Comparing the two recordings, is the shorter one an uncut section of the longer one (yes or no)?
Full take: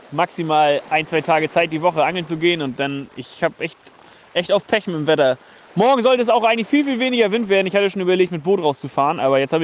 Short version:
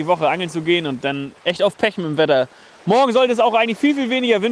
no